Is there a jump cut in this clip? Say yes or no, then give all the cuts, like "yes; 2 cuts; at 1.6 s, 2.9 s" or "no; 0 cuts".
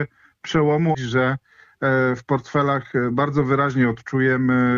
yes; 1 cut; at 0.9 s